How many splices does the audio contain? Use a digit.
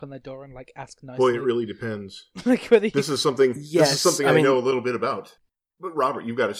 0